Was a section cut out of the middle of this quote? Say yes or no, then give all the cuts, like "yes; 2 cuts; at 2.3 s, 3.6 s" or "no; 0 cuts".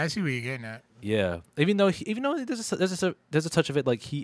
no; 0 cuts